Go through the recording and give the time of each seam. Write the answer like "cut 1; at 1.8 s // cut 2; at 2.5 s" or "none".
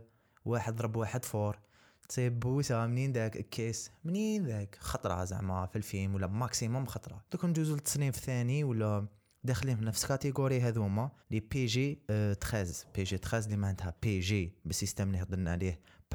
cut 1; at 7.3 s // cut 2; at 11.2 s